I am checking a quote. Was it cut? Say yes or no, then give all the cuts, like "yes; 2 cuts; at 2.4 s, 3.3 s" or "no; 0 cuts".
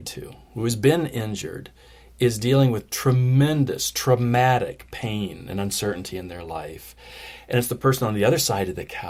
no; 0 cuts